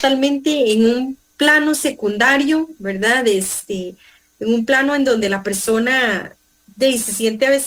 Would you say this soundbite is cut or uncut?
uncut